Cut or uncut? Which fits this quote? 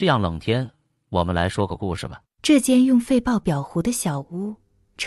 cut